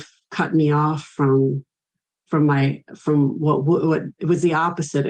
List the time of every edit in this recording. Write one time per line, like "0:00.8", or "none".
0:04.2

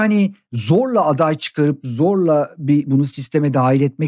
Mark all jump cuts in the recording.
0:02.9

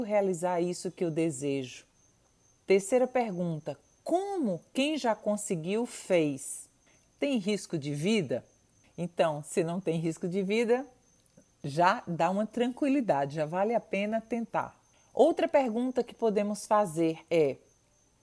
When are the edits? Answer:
0:07.1

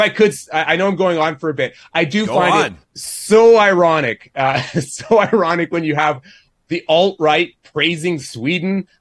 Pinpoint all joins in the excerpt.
0:02.8

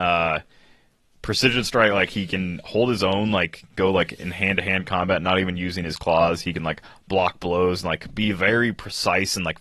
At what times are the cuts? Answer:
none

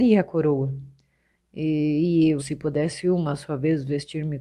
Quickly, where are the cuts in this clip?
0:02.4

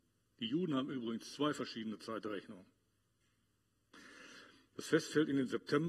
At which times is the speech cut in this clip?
0:04.7

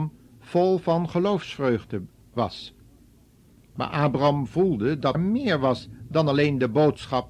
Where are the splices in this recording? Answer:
0:03.7
0:05.1

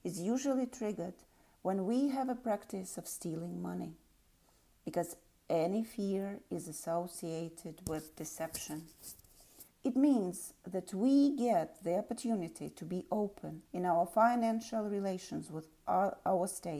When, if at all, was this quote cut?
0:09.7
0:13.7

